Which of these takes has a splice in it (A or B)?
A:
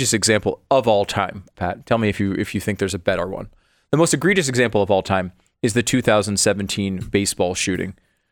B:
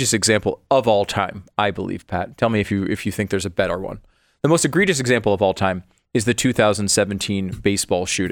A